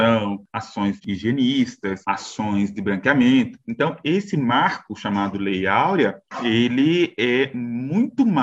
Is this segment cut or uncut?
uncut